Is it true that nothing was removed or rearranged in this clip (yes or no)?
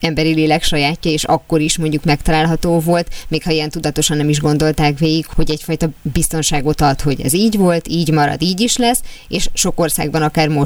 yes